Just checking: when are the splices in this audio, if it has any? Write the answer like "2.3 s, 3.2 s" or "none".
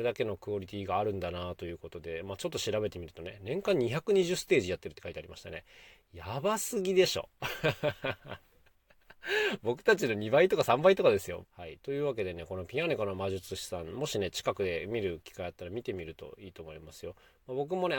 11.4 s